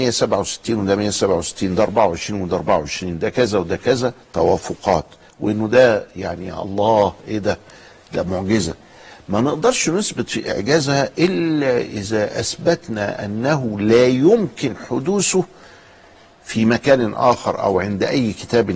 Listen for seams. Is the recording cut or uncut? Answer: uncut